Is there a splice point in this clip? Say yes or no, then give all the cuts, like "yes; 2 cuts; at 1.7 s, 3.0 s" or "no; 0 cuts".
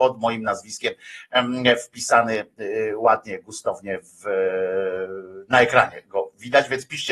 no; 0 cuts